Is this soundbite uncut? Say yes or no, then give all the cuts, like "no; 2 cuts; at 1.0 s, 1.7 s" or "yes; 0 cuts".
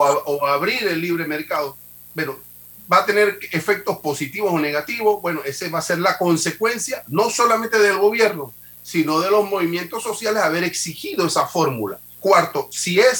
no; 1 cut; at 12.1 s